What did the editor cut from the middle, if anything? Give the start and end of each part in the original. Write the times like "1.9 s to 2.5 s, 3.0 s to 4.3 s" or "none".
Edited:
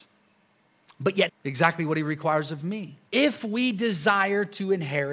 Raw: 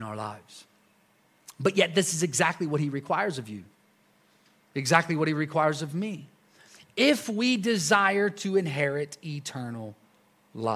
1.9 s to 4.6 s, 6.4 s to 6.9 s